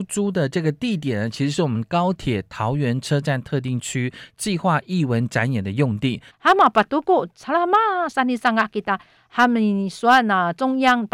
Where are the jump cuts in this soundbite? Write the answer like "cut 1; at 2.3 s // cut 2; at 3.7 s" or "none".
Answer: cut 1; at 6.3 s